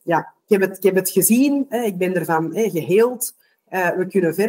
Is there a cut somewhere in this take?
no; 0 cuts

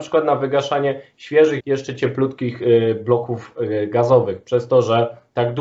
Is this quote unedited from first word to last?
no; 1 cut; at 1.6 s

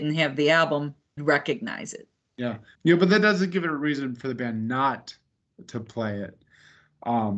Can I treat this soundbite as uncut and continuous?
no; 2 cuts; at 1.2 s, 2.7 s

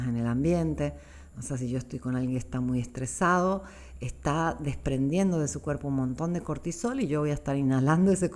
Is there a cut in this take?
no; 0 cuts

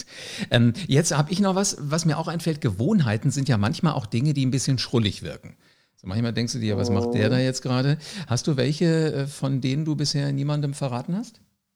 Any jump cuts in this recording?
no; 0 cuts

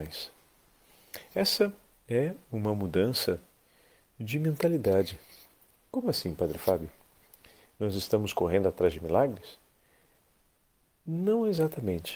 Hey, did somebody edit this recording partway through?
no; 0 cuts

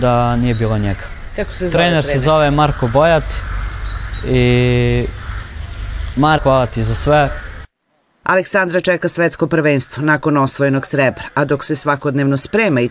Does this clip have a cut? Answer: yes; 1 cut; at 6.4 s

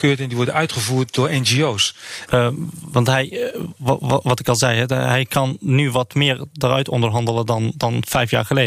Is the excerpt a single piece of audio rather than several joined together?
no; 1 cut; at 2.3 s

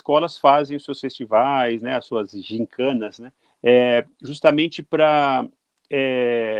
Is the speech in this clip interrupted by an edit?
yes; 1 cut; at 3.4 s

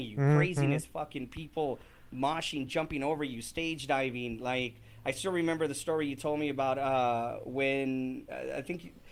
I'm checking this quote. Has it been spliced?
no; 0 cuts

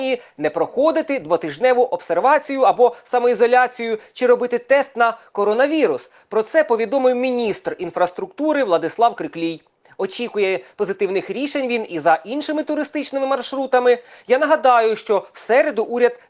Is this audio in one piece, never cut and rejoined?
yes; 0 cuts

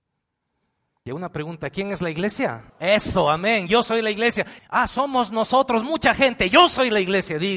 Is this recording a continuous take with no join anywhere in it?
no; 3 cuts; at 1.1 s, 2.7 s, 4.6 s

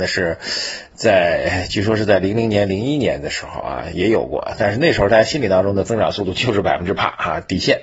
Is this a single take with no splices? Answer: yes; 0 cuts

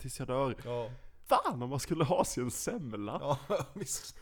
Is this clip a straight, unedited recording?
no; 1 cut; at 1.3 s

